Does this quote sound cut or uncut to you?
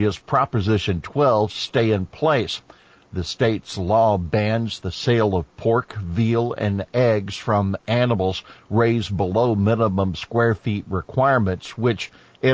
uncut